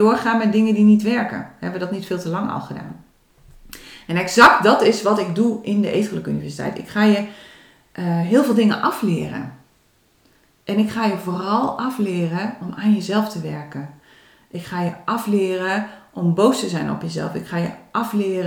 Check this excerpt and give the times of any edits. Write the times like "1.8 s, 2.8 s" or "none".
none

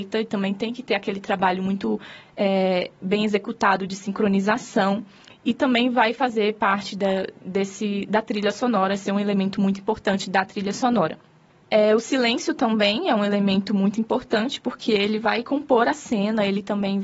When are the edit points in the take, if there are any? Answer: none

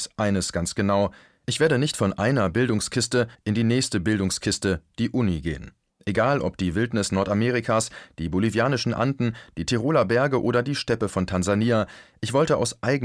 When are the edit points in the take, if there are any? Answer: 3.3 s, 5.9 s

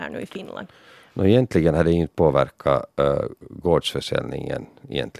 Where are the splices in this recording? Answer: none

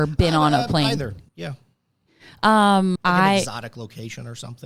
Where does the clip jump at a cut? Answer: 1.3 s, 3.0 s

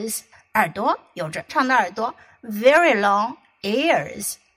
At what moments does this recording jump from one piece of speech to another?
1.5 s

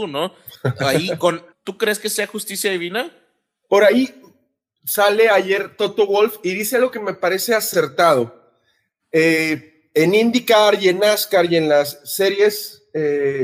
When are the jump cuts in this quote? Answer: 1.5 s

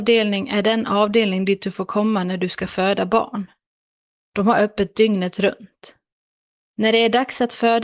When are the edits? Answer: none

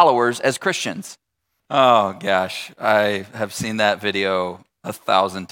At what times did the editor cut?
1.6 s

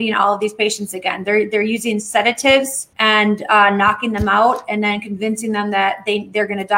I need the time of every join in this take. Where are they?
2.9 s

